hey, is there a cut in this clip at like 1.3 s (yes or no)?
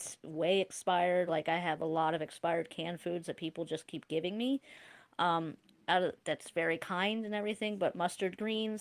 no